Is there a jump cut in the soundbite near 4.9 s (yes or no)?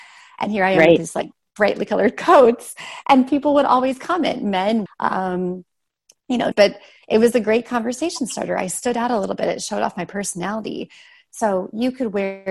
yes